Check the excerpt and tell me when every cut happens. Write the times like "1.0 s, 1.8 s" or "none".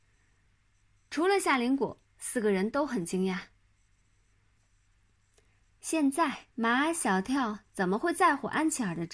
4.6 s, 6.5 s